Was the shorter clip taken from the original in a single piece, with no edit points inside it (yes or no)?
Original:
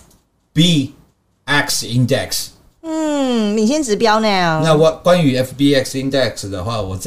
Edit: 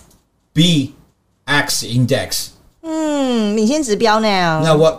yes